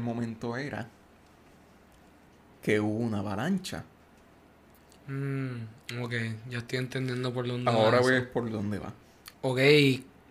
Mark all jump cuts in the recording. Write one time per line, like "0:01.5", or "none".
0:09.3